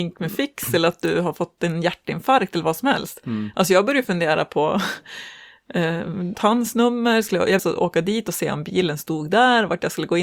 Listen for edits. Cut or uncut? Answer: cut